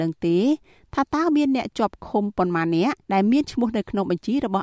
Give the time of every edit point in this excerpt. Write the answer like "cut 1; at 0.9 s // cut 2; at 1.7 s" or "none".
cut 1; at 3.0 s